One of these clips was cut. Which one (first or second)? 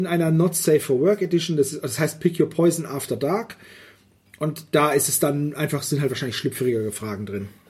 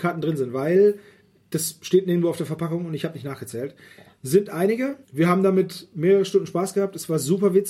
second